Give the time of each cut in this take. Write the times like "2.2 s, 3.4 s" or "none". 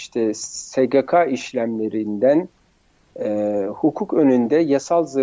none